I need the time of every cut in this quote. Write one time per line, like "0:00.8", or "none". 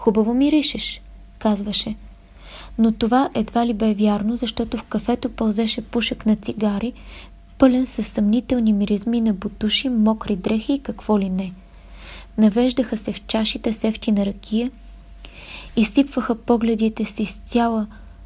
0:12.3